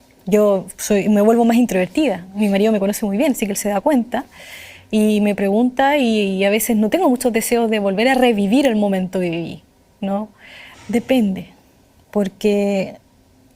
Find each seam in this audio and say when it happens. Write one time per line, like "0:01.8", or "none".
0:10.7